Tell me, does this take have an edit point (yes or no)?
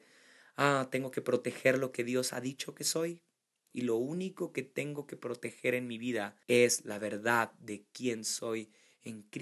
yes